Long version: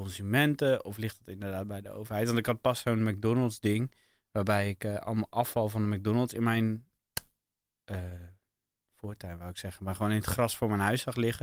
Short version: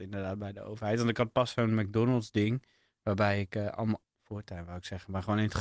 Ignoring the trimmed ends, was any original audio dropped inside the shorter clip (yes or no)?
yes